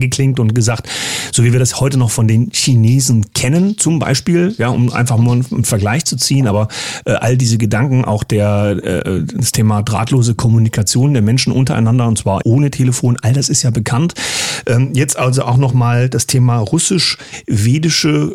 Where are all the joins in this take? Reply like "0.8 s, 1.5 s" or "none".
12.4 s

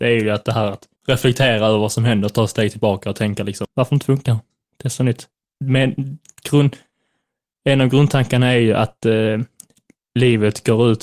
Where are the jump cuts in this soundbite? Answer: 1.0 s, 3.6 s

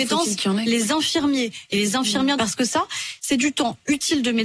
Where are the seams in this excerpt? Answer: 2.4 s

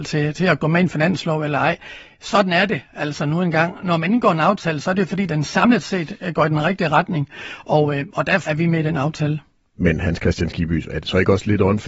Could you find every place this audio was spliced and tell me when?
8.5 s

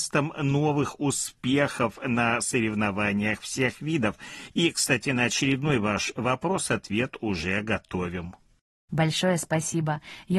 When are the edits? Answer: 4.5 s, 8.9 s

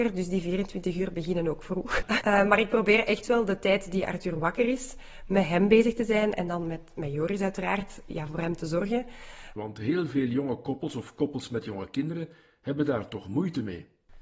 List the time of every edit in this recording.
2.2 s, 9.6 s

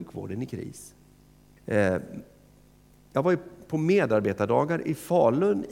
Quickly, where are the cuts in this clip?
1.6 s

